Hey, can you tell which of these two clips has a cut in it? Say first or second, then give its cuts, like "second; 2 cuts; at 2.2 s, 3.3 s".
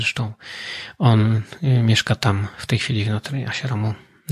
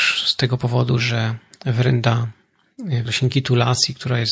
second; 1 cut; at 3.1 s